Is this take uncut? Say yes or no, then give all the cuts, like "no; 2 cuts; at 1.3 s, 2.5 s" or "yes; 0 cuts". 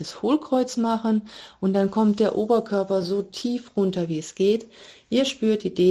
yes; 0 cuts